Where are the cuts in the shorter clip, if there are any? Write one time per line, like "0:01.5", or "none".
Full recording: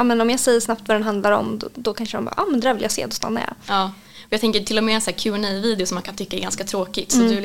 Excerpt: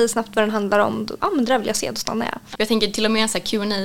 0:01.2
0:02.5